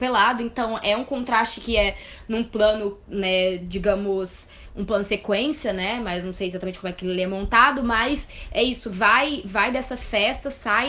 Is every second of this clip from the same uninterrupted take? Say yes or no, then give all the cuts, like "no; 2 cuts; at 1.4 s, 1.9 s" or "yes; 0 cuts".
yes; 0 cuts